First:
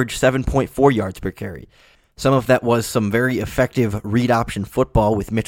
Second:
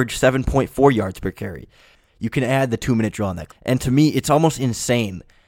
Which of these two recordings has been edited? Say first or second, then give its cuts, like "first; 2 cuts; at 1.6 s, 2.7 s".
second; 2 cuts; at 2.1 s, 3.5 s